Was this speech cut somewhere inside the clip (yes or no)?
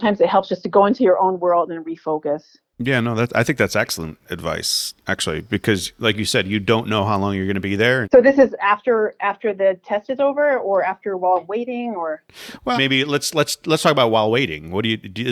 yes